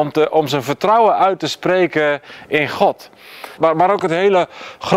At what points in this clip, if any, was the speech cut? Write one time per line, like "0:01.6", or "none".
0:03.6